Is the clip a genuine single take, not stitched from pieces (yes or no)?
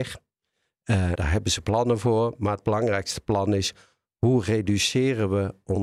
no